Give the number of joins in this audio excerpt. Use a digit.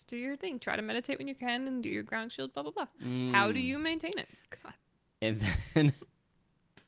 1